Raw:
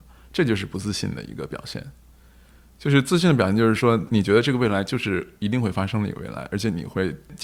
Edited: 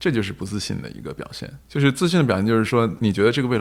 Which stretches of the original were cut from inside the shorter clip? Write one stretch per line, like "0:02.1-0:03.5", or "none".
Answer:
0:01.9-0:02.7